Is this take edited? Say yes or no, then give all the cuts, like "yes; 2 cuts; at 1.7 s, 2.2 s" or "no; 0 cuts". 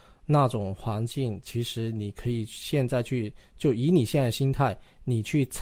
no; 0 cuts